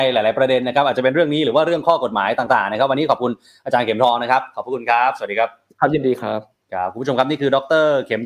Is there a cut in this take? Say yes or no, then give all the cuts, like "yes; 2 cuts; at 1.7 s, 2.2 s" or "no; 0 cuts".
yes; 1 cut; at 6.6 s